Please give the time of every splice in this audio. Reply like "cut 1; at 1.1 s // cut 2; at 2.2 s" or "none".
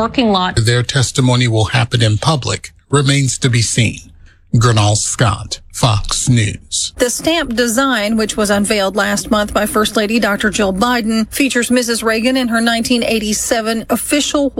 cut 1; at 7.0 s

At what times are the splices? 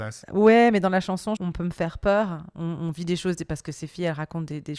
cut 1; at 1.4 s

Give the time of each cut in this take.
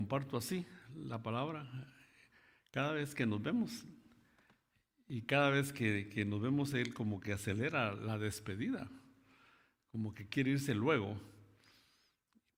none

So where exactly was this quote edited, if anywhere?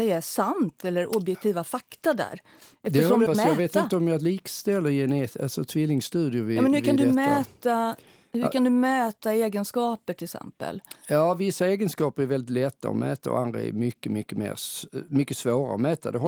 cut 1; at 3.3 s

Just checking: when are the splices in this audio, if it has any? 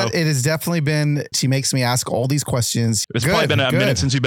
cut 1; at 1.3 s // cut 2; at 3.0 s

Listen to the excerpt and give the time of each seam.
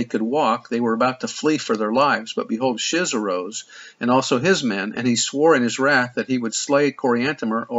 none

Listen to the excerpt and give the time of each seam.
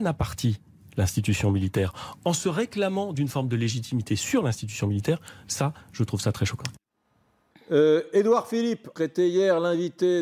cut 1; at 7.5 s // cut 2; at 9.0 s

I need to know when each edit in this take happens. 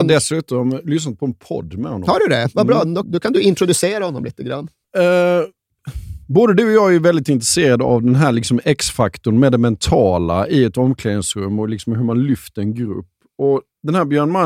cut 1; at 3.0 s // cut 2; at 4.8 s

